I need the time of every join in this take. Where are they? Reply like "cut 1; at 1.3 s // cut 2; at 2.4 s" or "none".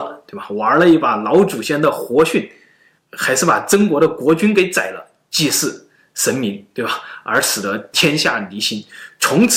none